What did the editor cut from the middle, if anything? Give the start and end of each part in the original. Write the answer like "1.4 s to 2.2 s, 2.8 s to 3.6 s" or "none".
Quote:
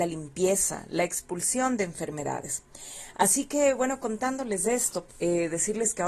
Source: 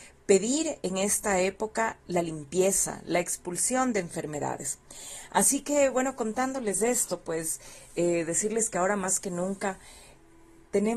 7.2 s to 7.8 s